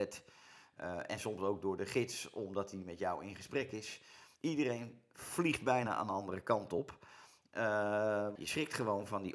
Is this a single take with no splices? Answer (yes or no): no